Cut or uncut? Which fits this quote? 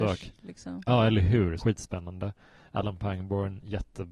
cut